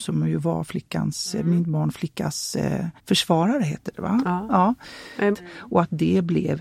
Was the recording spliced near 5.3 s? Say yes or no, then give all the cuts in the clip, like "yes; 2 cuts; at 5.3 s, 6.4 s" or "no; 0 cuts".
yes; 2 cuts; at 3.0 s, 5.3 s